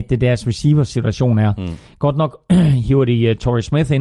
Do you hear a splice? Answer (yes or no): no